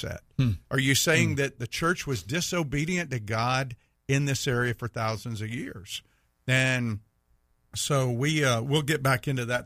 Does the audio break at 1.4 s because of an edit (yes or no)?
no